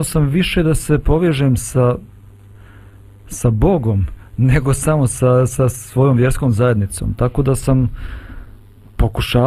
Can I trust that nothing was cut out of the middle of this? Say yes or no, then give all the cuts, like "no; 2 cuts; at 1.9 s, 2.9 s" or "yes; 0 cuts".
yes; 0 cuts